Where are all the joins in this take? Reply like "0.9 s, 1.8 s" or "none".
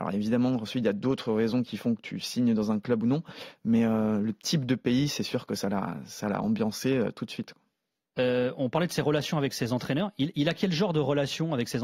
none

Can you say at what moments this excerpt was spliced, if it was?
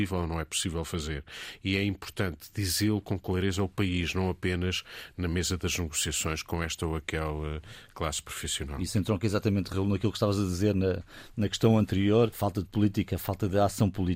12.3 s

